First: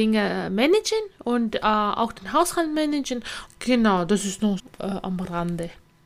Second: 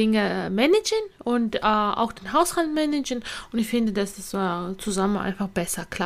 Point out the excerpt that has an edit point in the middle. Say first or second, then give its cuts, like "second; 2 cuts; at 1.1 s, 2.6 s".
first; 2 cuts; at 3.5 s, 4.6 s